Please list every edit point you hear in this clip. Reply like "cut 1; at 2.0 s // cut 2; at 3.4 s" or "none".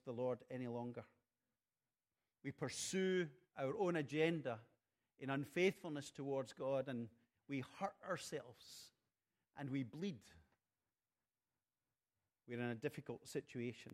cut 1; at 2.3 s